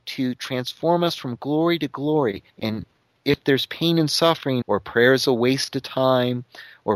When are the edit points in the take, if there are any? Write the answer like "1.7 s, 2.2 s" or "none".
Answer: 2.5 s, 4.6 s